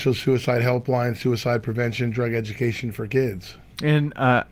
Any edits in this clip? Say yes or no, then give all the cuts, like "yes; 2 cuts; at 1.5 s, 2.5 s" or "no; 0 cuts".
no; 0 cuts